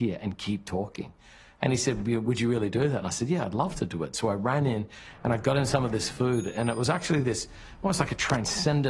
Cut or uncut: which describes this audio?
uncut